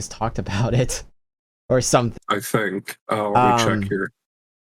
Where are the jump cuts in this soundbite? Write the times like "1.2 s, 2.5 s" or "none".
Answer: 2.2 s